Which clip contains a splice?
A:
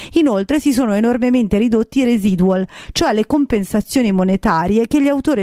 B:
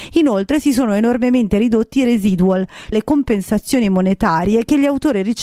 B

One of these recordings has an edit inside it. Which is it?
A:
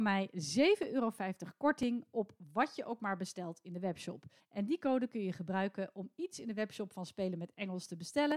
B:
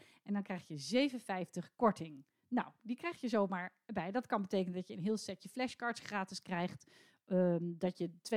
A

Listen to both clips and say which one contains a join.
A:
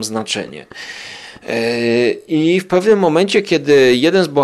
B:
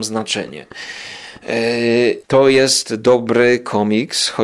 B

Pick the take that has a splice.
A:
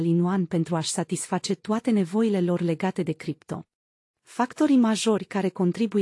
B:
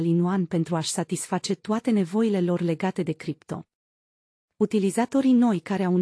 A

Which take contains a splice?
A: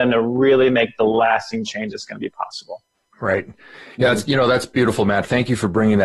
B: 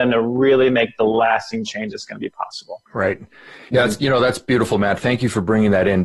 B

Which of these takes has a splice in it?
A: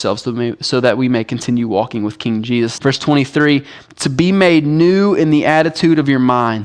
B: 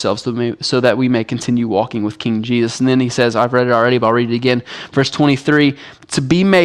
A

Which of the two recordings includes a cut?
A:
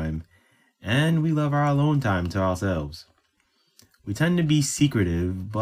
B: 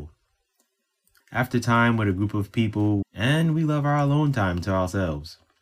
B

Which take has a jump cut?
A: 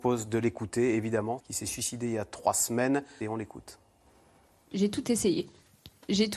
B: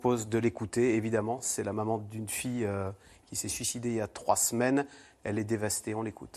A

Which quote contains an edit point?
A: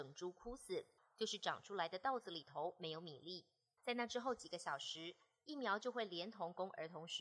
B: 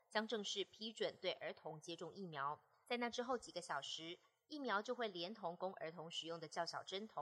A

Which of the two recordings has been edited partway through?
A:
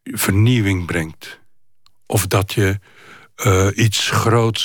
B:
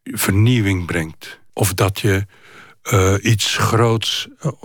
B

